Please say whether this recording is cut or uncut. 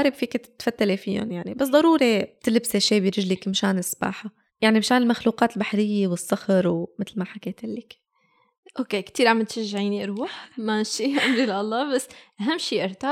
uncut